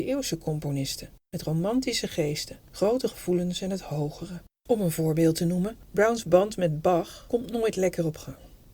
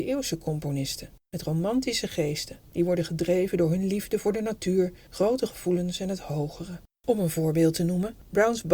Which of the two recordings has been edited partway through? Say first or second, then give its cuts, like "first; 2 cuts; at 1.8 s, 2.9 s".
first; 1 cut; at 2.7 s